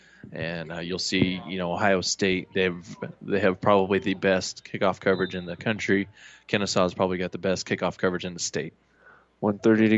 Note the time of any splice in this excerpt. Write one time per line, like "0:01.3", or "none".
none